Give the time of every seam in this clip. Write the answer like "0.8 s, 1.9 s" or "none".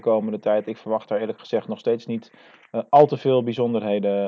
none

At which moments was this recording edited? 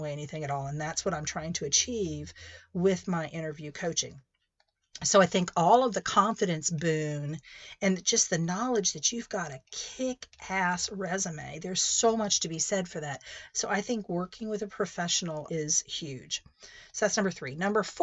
13.5 s, 15.5 s

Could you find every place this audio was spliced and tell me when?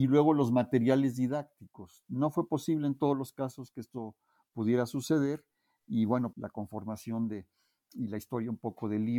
6.3 s

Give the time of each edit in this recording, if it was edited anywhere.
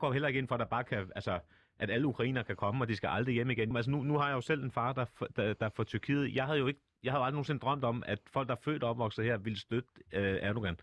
3.7 s

